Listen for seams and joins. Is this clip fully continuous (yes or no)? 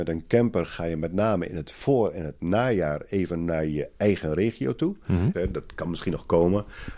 no